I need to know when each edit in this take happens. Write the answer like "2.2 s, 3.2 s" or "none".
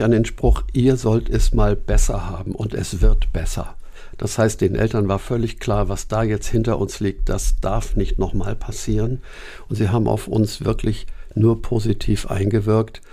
none